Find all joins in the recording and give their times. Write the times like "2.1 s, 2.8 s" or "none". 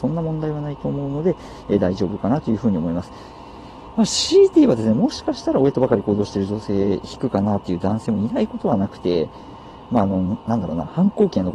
none